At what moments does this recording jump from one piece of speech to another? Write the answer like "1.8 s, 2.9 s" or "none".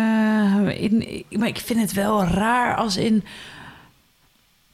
1.0 s